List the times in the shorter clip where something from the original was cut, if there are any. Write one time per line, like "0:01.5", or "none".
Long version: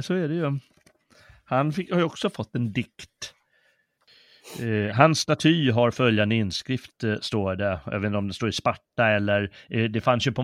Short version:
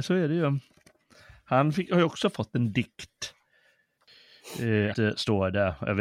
0:04.9